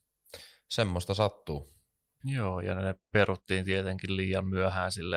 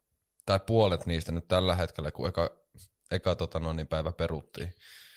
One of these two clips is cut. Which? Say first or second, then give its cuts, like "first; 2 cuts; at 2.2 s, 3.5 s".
first; 1 cut; at 2.2 s